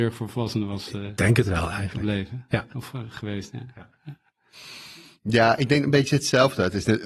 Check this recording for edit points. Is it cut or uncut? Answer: uncut